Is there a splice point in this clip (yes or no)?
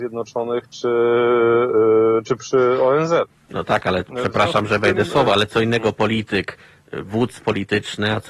no